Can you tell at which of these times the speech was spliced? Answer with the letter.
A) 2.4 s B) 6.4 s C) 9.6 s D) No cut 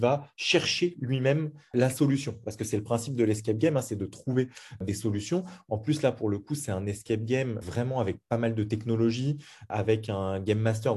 D